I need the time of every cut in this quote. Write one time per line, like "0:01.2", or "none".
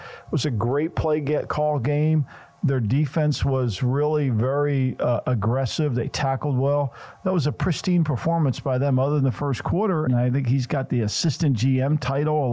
0:10.1